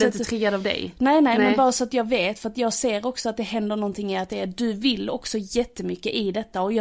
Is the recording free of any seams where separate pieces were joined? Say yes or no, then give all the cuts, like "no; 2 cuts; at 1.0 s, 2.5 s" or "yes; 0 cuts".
yes; 0 cuts